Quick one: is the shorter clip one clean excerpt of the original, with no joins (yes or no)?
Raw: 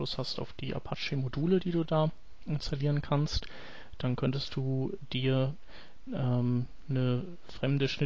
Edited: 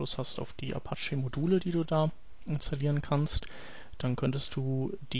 yes